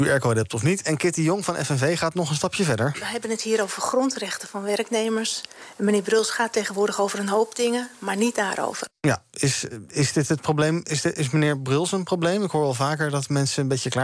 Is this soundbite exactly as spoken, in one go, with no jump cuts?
yes; 0 cuts

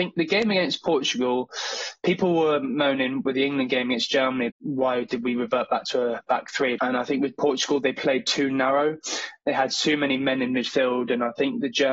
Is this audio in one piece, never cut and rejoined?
no; 2 cuts; at 4.5 s, 6.8 s

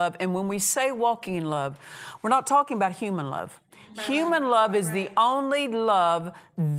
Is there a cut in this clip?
no; 0 cuts

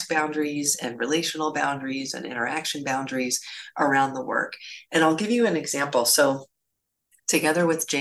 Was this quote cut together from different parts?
no; 0 cuts

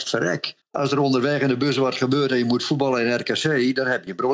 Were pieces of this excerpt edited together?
no; 0 cuts

